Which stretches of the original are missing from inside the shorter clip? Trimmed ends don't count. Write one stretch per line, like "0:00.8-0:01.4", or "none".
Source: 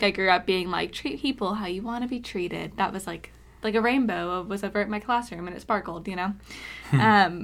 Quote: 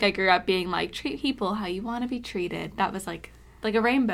none